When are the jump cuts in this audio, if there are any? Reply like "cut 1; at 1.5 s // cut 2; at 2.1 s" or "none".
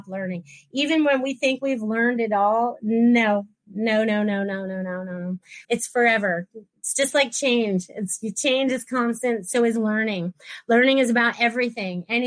cut 1; at 5.6 s